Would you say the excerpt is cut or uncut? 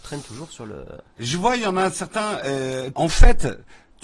cut